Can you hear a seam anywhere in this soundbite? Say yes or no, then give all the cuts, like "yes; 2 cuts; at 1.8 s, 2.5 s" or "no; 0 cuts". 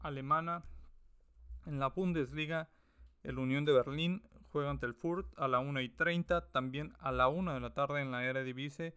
no; 0 cuts